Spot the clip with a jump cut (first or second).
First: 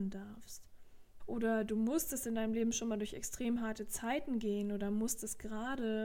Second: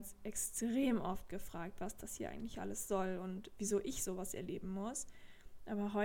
first